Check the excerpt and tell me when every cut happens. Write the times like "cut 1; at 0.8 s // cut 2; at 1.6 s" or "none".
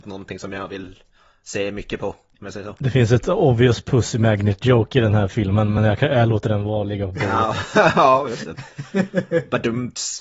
none